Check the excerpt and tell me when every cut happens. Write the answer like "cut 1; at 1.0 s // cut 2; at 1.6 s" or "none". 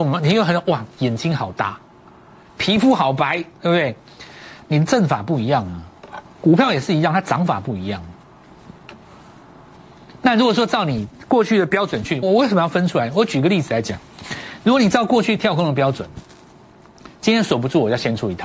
cut 1; at 12.2 s

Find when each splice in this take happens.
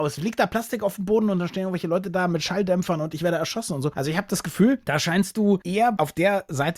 none

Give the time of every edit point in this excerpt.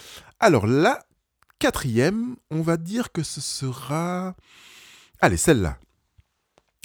none

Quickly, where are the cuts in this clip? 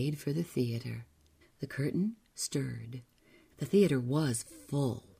cut 1; at 1.4 s // cut 2; at 3.5 s

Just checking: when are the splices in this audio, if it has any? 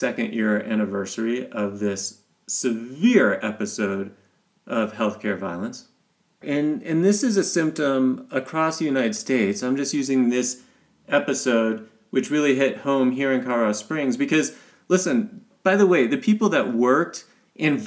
cut 1; at 6.4 s

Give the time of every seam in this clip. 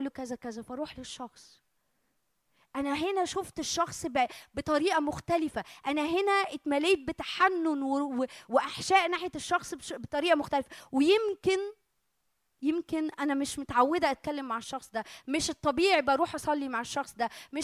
none

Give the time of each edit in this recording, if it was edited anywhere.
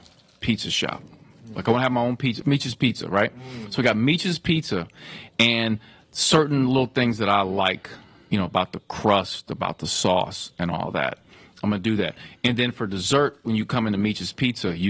cut 1; at 2.4 s

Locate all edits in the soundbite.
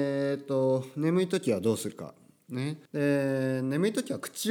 cut 1; at 2.8 s

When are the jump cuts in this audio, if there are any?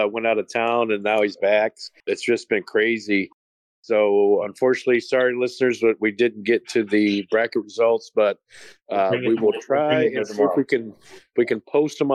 none

